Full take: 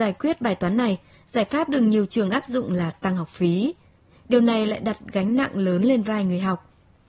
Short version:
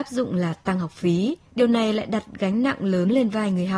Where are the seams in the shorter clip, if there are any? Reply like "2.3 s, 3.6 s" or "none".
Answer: 1.5 s